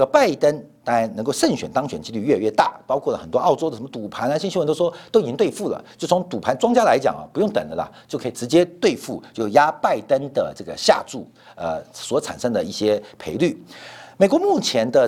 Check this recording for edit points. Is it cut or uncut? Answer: uncut